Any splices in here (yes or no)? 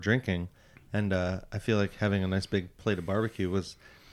no